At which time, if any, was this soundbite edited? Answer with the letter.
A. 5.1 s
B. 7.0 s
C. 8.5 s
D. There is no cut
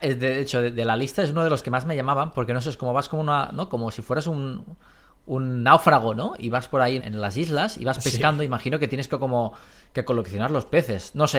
B